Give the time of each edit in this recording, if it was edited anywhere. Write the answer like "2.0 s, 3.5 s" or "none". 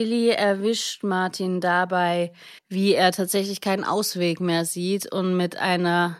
2.6 s